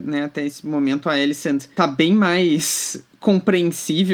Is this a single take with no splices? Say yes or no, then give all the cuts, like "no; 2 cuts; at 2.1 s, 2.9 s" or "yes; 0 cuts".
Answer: yes; 0 cuts